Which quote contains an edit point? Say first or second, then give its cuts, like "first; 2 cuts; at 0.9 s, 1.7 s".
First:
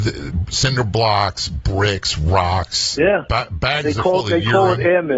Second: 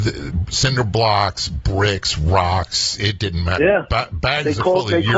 first; 1 cut; at 3.0 s